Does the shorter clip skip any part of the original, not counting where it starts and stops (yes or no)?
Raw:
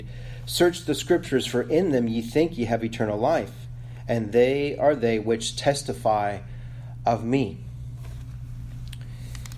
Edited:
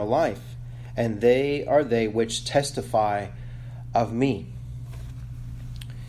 no